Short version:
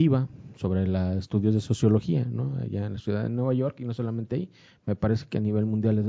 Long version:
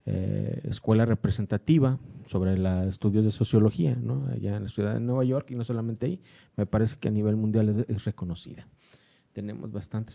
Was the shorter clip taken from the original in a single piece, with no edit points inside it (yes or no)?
yes